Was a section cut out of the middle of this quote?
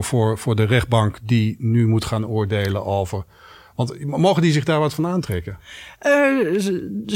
no; 0 cuts

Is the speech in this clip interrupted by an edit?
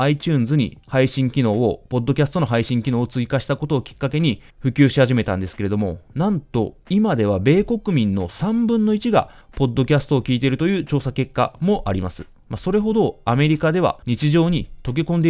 no; 0 cuts

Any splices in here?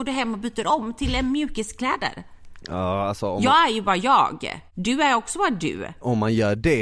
no; 0 cuts

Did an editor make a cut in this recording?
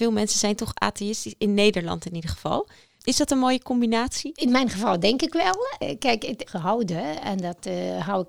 yes; 1 cut; at 6.5 s

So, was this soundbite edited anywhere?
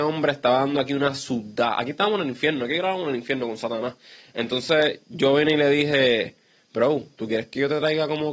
no; 0 cuts

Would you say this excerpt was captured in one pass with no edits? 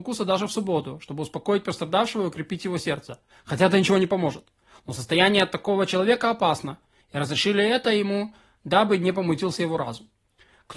yes; 0 cuts

